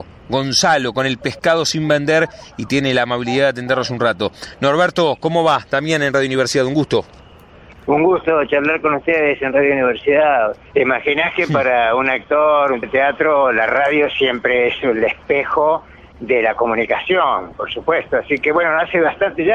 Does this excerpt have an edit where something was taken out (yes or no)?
yes